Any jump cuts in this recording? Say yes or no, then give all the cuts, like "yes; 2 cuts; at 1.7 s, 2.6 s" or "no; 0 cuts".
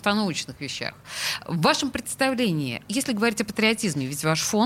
yes; 2 cuts; at 1.4 s, 2.8 s